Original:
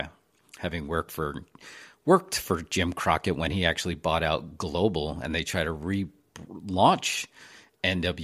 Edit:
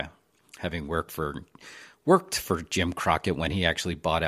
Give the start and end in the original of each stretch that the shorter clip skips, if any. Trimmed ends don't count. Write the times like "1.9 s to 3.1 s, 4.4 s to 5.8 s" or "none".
none